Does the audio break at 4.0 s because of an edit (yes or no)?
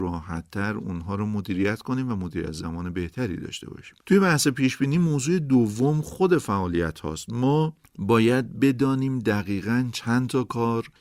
yes